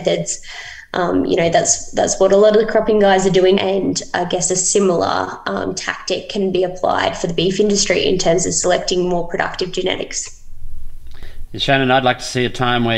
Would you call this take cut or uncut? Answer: cut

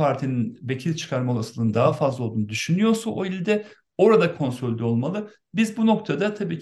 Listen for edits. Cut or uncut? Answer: uncut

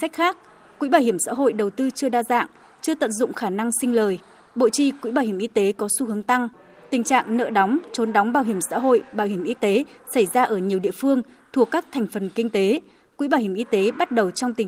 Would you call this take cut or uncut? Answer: uncut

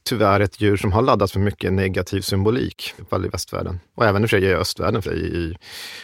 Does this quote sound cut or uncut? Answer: cut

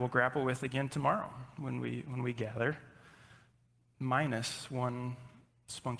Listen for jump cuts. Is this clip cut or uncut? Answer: uncut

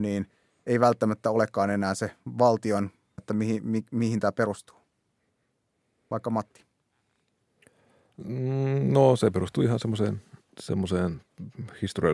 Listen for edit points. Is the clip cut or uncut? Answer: cut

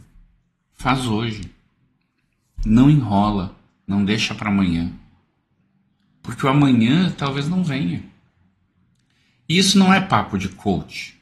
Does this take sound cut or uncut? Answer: uncut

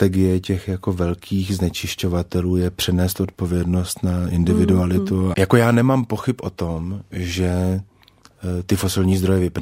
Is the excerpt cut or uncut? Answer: cut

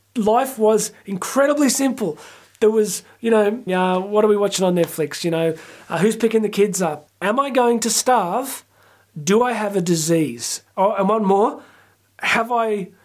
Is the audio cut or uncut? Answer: cut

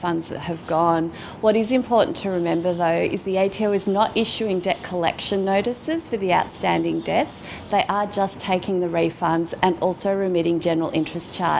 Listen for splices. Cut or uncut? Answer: uncut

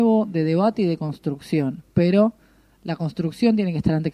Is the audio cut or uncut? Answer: uncut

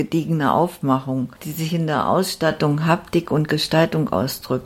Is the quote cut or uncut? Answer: uncut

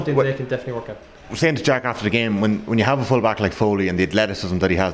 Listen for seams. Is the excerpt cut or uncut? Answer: uncut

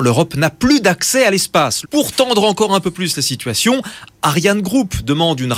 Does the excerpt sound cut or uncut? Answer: cut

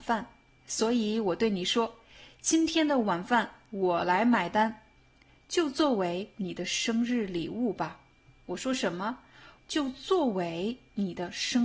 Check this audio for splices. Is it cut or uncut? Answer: cut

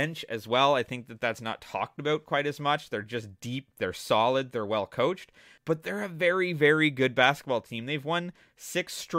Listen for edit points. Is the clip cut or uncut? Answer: cut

